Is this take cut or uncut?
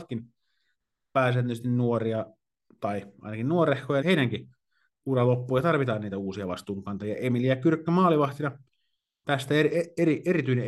cut